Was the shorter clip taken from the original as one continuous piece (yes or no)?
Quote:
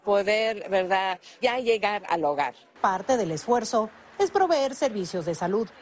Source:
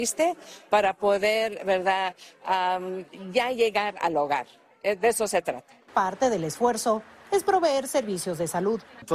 no